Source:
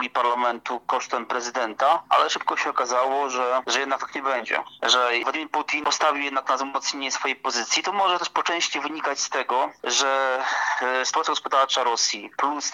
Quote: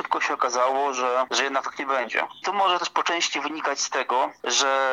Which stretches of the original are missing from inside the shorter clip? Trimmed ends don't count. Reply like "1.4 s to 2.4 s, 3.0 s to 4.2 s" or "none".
4.8 s to 7.8 s